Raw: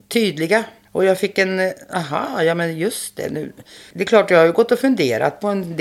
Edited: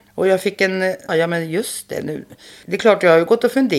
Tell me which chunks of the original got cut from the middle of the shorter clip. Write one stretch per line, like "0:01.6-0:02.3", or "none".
0:01.9-0:02.4